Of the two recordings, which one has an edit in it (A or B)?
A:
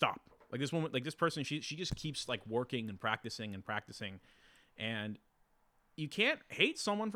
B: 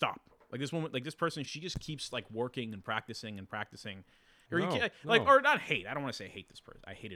B